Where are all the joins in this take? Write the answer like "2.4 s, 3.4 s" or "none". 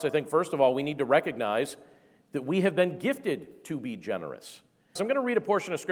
5.0 s

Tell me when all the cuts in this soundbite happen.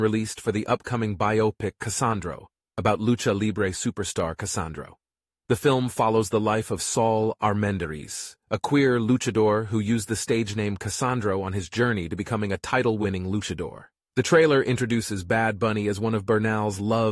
none

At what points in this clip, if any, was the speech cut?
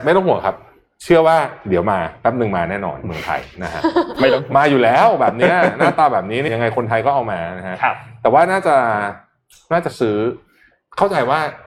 6.5 s

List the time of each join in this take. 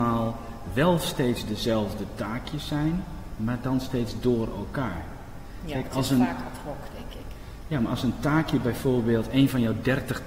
none

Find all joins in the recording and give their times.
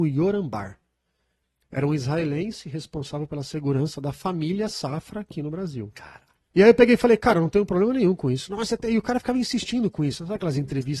6.5 s

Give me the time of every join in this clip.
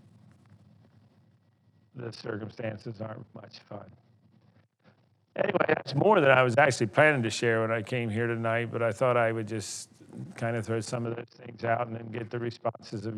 3.2 s

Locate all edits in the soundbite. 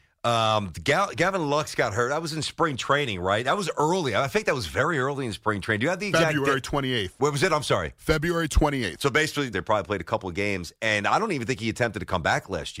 9.5 s

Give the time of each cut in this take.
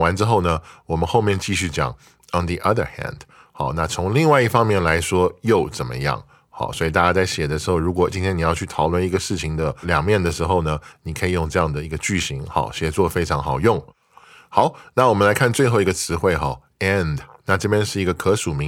none

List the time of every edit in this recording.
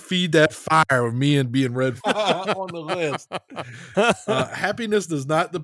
2.0 s, 3.9 s

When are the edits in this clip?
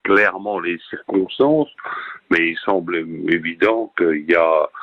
none

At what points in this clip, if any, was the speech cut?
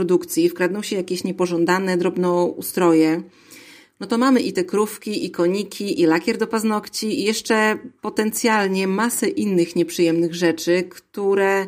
none

